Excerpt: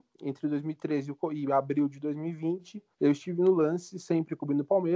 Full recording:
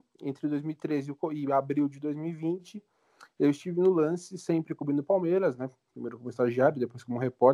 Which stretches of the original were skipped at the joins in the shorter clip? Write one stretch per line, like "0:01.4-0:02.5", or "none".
0:02.9-0:03.3